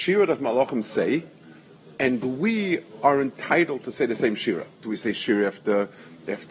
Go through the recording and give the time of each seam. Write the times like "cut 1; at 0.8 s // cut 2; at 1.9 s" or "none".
cut 1; at 4.8 s

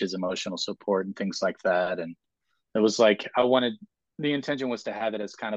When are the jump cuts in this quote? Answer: none

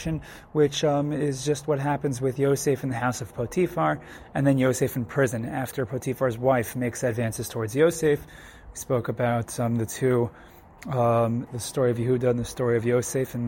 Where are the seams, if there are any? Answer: cut 1; at 11.5 s

